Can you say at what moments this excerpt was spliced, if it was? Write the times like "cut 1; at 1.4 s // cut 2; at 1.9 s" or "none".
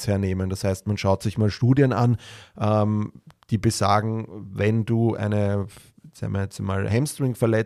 none